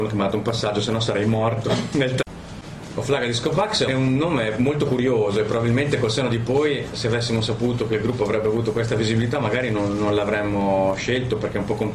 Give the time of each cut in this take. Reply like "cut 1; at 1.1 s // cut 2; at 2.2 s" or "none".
cut 1; at 3.9 s

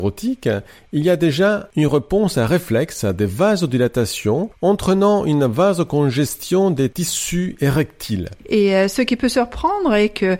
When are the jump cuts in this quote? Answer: cut 1; at 8.4 s

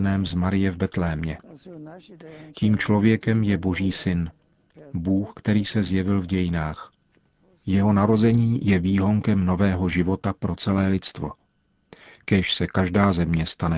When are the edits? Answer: none

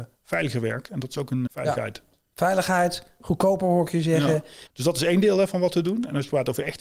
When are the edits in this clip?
cut 1; at 1.5 s // cut 2; at 4.7 s

